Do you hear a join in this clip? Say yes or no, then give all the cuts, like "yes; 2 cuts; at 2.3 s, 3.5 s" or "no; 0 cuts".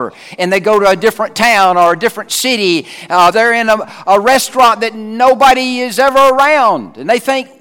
yes; 1 cut; at 3.3 s